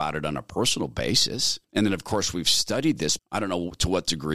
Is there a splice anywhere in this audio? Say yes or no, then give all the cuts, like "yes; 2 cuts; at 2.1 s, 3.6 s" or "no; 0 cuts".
yes; 2 cuts; at 1.6 s, 3.2 s